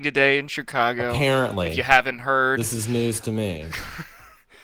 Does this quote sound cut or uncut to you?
uncut